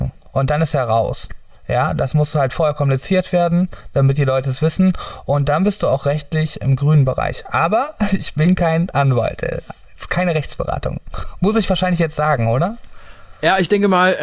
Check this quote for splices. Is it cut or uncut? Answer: uncut